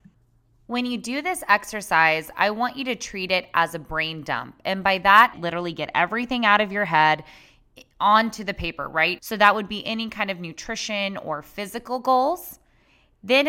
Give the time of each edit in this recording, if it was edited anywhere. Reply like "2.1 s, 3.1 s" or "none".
5.3 s, 9.2 s